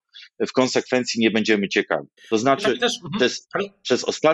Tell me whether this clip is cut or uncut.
cut